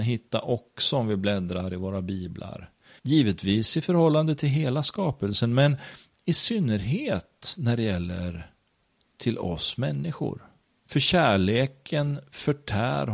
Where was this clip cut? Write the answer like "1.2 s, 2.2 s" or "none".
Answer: 3.0 s, 10.8 s